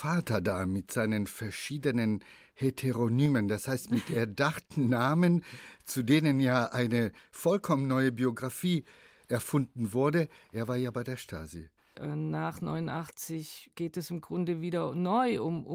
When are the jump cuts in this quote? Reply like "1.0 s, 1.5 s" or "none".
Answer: 11.9 s